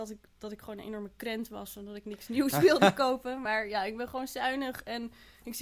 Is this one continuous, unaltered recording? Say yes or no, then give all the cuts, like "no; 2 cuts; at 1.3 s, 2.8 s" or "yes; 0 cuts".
yes; 0 cuts